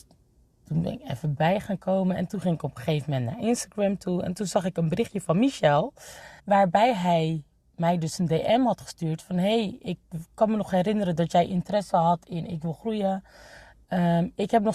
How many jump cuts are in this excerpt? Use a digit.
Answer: 1